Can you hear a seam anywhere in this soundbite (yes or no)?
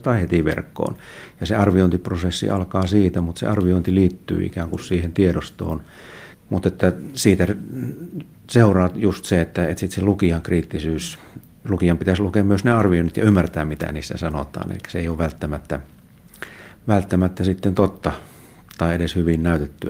yes